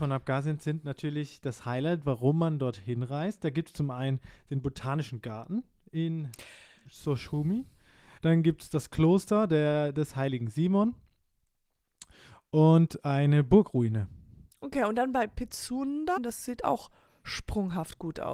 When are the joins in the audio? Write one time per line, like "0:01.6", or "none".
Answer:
0:08.2
0:16.2